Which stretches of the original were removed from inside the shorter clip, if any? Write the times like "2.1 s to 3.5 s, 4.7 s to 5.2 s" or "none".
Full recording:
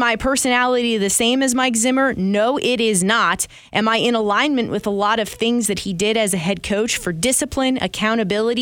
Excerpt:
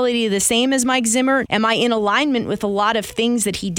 2.1 s to 3.7 s